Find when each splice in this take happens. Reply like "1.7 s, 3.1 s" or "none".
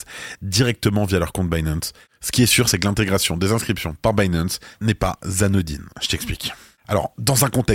none